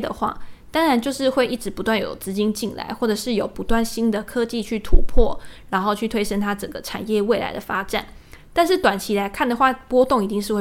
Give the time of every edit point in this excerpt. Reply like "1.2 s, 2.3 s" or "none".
none